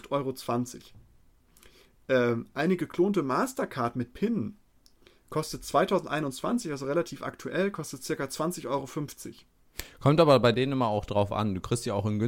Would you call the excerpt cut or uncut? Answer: uncut